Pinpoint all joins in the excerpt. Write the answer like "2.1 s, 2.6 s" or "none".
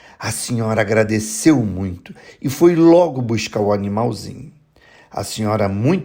none